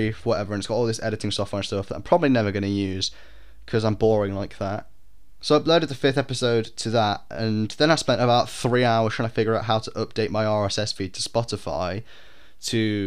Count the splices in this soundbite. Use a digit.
1